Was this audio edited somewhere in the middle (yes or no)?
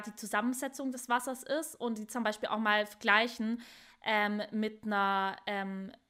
no